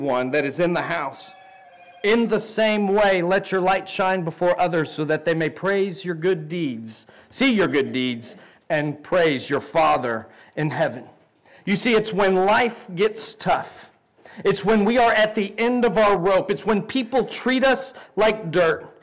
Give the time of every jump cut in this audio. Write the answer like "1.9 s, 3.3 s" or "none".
none